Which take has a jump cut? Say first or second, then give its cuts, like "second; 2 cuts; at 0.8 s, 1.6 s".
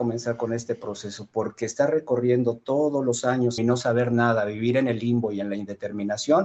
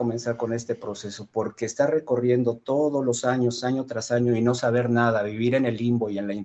first; 1 cut; at 3.6 s